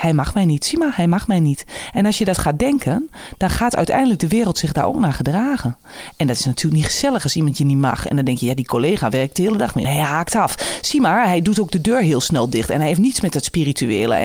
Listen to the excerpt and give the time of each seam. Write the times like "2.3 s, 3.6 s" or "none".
9.8 s